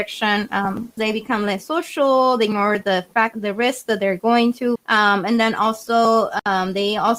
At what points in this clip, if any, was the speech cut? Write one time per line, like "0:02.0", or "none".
0:01.0
0:03.3
0:04.8